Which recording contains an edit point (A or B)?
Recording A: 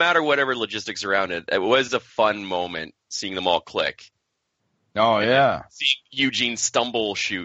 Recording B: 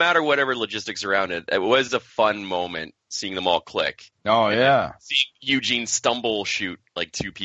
B